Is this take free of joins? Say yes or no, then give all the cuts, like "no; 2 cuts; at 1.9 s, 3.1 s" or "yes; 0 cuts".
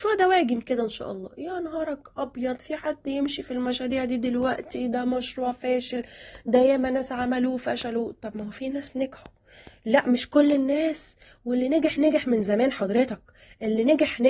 yes; 0 cuts